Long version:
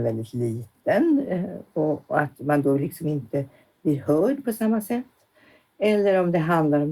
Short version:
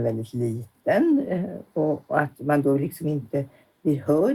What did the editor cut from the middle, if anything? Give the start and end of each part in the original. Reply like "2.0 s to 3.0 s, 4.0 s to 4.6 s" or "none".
none